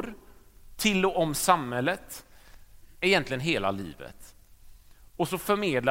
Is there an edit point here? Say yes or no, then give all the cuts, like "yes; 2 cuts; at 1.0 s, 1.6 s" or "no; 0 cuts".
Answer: yes; 1 cut; at 2.9 s